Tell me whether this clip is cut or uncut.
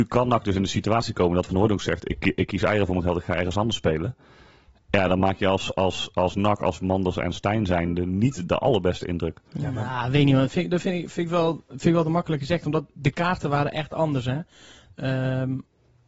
uncut